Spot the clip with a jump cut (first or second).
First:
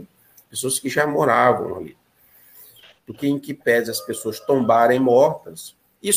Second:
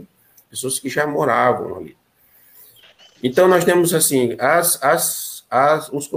first